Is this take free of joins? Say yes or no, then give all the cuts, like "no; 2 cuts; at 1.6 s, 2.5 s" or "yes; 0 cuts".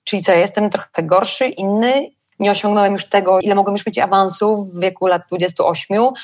no; 2 cuts; at 2.3 s, 3.4 s